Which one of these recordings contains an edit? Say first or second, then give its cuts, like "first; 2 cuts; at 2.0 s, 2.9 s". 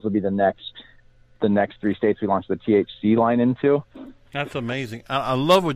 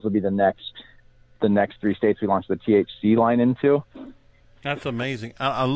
first; 1 cut; at 4.2 s